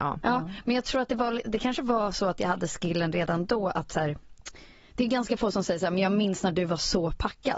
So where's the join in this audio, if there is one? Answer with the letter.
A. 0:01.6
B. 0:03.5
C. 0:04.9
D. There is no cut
D